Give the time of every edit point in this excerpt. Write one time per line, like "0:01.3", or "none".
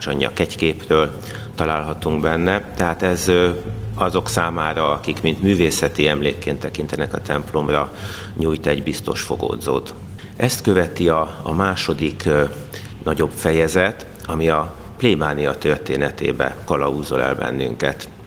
none